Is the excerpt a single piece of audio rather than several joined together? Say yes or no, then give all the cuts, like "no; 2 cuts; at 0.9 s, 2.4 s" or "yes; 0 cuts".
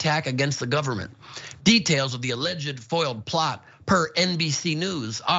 no; 1 cut; at 1.6 s